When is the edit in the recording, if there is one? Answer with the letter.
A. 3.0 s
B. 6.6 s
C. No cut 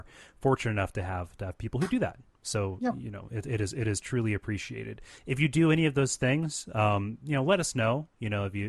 C